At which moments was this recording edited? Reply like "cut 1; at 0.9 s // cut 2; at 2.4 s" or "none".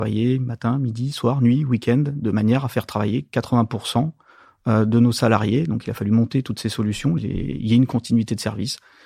cut 1; at 7.2 s